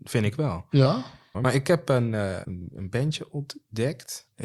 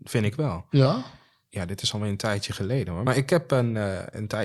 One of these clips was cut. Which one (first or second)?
first